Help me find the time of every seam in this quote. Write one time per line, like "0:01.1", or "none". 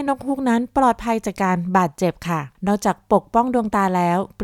0:02.5